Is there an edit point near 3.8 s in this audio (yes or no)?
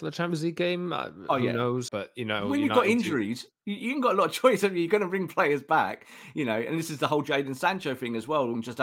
no